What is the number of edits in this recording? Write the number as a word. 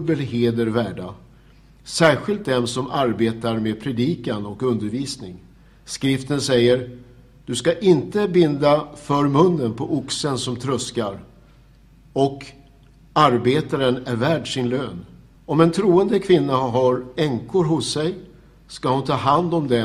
one